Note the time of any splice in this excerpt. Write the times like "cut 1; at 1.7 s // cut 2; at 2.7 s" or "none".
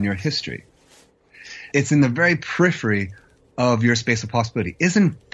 cut 1; at 1.7 s